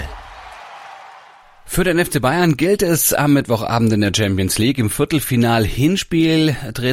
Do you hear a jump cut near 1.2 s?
no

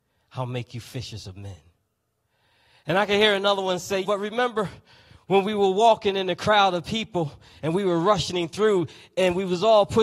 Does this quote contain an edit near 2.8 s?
no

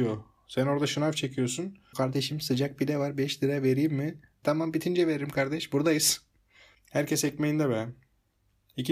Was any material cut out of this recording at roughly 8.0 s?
no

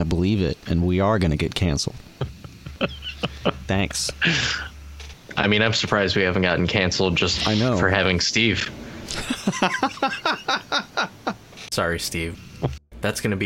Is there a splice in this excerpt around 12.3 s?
yes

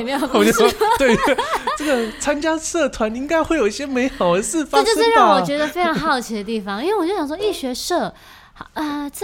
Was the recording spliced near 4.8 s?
no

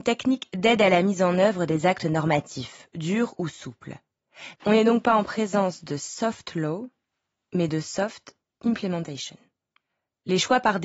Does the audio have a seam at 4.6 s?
yes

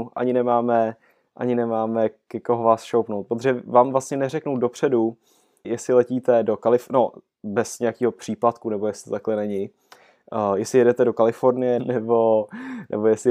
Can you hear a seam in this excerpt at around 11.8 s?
yes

